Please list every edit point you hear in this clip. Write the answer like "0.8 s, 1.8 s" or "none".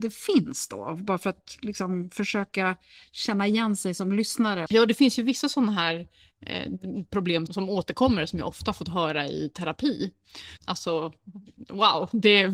7.5 s, 10.6 s